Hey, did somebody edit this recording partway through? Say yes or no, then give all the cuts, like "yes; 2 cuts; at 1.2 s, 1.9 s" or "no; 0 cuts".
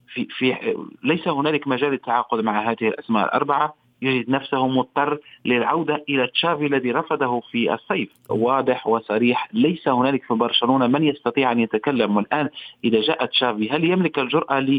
yes; 1 cut; at 8.3 s